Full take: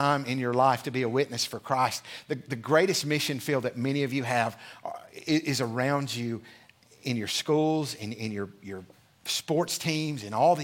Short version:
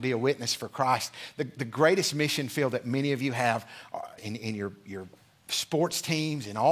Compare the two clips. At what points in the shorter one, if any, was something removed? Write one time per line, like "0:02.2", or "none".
0:04.2